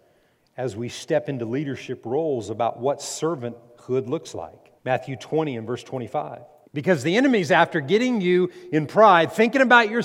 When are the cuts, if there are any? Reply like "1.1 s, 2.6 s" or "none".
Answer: 4.8 s, 6.6 s